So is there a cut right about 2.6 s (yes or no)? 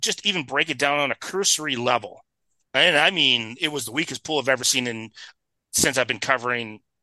yes